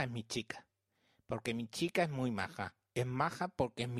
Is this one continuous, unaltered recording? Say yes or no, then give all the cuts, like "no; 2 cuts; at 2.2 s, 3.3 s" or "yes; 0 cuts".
yes; 0 cuts